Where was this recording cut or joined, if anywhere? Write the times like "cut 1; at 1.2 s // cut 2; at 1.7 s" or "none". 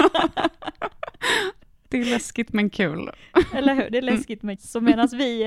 cut 1; at 4.6 s